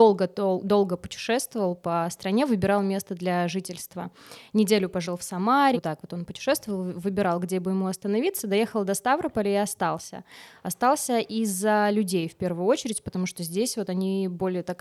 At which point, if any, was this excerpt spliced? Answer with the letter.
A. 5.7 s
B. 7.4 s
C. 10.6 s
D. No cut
A